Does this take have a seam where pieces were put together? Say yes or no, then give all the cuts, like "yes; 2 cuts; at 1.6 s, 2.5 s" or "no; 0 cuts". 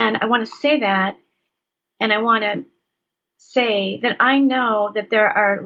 no; 0 cuts